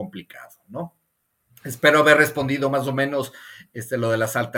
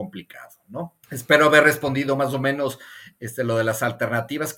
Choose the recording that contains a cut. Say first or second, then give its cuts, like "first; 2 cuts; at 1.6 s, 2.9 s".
second; 1 cut; at 1.0 s